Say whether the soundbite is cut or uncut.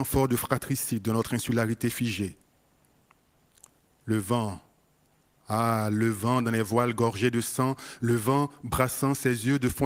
uncut